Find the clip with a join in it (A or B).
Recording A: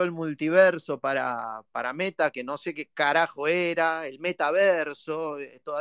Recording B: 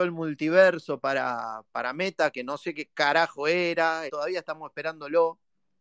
B